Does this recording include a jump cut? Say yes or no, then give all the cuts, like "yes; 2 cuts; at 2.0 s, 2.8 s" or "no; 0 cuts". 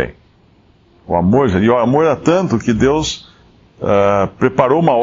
no; 0 cuts